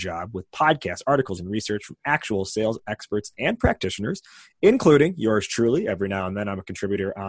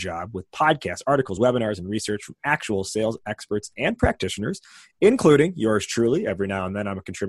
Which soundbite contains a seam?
first; 1 cut; at 1.4 s

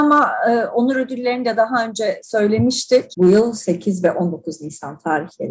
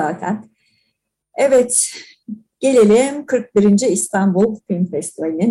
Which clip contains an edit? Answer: first; 1 cut; at 3.1 s

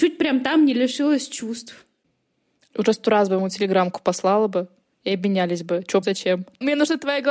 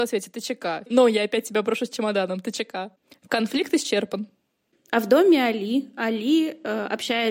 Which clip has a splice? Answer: first; 2 cuts; at 2.7 s, 6.0 s

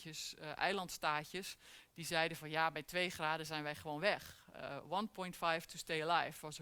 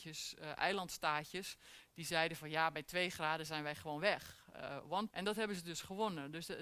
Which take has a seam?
second; 1 cut; at 5.1 s

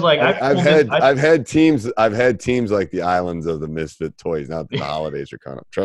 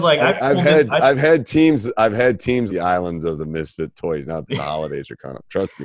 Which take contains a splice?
second; 1 cut; at 2.7 s

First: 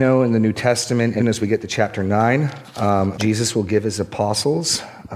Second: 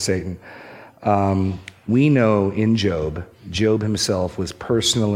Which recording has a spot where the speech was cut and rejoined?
first; 2 cuts; at 1.2 s, 3.1 s

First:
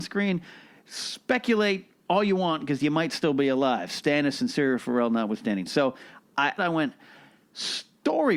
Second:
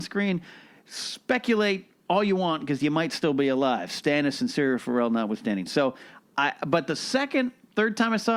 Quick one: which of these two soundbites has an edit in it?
first; 1 cut; at 6.6 s

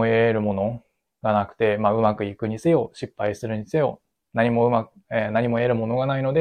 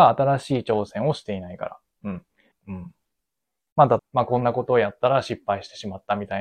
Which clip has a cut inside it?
second; 2 cuts; at 2.5 s, 4.0 s

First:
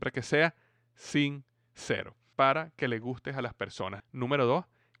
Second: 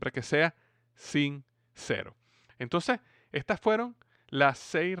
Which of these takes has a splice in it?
first; 2 cuts; at 2.3 s, 4.0 s

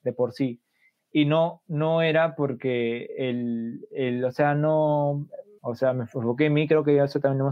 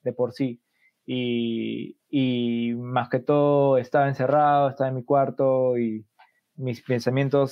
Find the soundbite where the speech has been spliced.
first; 2 cuts; at 1.0 s, 5.6 s

